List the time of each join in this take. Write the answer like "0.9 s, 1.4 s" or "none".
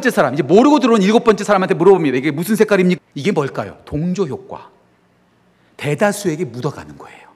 3.0 s